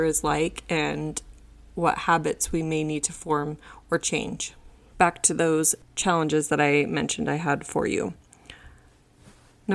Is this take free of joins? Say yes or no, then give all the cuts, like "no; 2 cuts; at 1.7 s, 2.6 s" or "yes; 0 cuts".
no; 1 cut; at 4.9 s